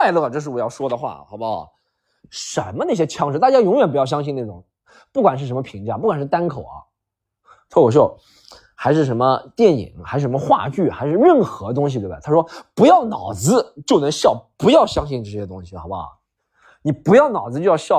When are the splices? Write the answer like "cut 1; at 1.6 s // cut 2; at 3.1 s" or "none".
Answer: none